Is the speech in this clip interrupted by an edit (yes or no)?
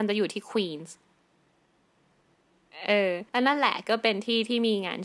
yes